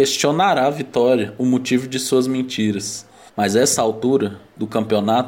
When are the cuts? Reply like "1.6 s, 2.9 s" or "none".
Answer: 3.3 s

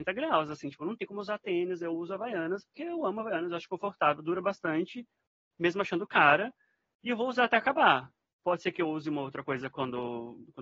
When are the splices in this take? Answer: none

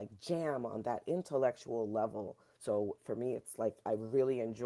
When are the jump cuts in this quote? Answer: 2.5 s

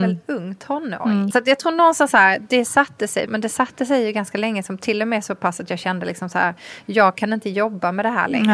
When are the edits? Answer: 1.3 s, 3.3 s

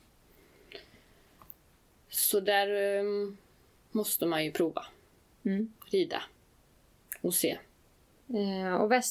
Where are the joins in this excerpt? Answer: none

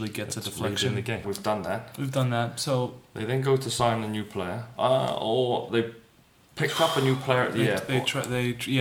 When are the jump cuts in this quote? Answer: 1.2 s

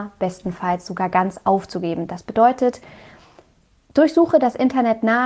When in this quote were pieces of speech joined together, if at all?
none

